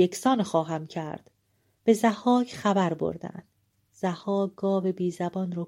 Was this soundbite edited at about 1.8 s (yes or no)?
yes